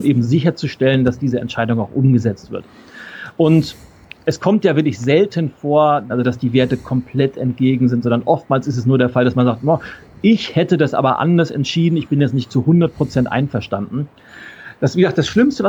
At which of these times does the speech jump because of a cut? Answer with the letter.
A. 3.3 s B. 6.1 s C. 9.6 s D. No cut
B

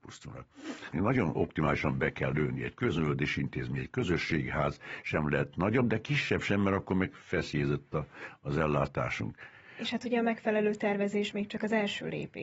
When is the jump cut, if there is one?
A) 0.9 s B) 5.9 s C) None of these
A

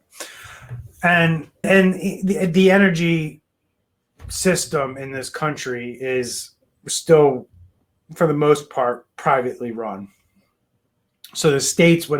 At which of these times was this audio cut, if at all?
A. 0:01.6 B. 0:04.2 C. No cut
A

